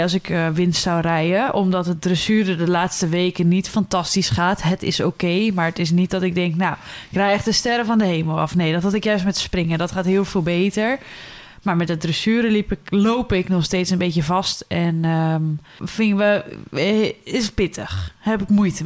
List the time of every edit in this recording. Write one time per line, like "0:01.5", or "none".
0:15.8